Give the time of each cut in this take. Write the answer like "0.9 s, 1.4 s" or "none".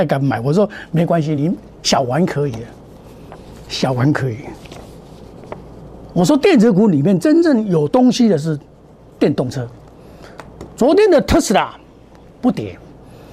none